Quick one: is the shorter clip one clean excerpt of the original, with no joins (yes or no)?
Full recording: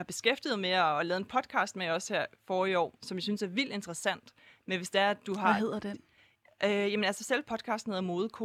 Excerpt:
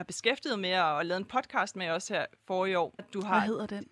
no